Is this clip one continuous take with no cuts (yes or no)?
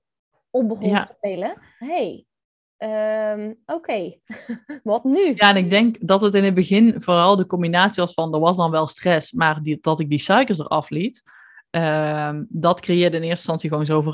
no